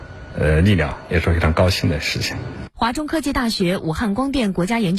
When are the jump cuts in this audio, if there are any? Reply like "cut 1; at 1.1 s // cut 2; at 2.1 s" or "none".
cut 1; at 2.7 s